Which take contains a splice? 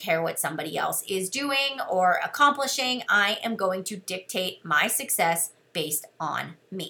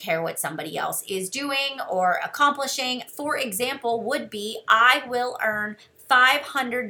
second; 1 cut; at 3.1 s

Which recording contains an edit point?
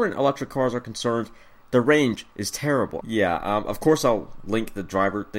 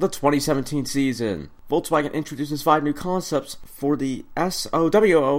first; 1 cut; at 3.0 s

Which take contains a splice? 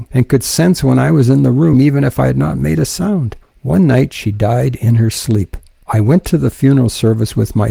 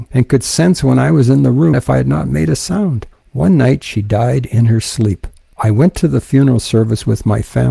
second; 1 cut; at 1.7 s

